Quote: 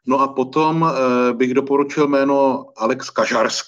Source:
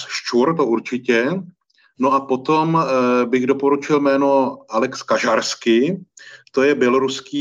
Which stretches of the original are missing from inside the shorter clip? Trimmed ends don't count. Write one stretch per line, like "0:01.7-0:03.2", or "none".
none